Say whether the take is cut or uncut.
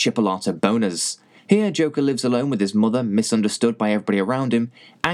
cut